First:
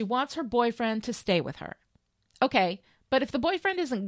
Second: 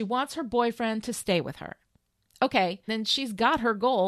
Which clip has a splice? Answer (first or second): second